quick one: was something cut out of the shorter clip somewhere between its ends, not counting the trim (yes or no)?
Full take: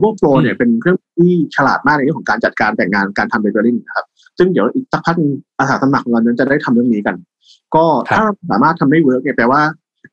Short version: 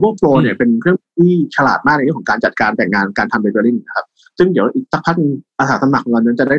no